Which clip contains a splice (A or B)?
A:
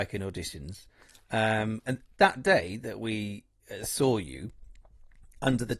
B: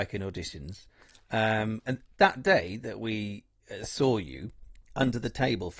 B